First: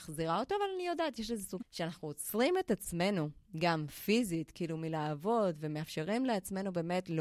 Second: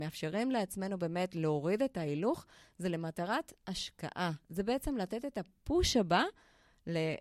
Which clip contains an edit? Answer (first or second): first